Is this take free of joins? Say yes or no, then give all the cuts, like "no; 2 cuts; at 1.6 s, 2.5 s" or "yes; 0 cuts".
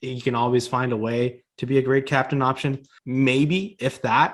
no; 1 cut; at 3.0 s